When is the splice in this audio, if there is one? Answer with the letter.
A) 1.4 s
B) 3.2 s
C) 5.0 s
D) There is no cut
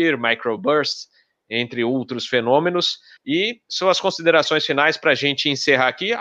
B